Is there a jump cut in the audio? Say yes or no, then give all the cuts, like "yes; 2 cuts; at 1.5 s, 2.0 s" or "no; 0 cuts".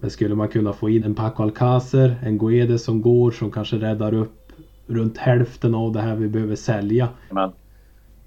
yes; 2 cuts; at 1.0 s, 7.3 s